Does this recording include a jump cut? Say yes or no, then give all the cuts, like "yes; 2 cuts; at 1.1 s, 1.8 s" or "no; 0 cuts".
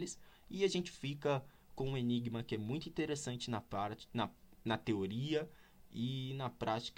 no; 0 cuts